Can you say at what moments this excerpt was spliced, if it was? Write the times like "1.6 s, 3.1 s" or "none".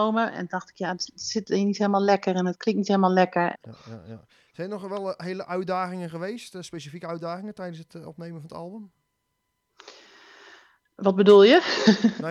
3.6 s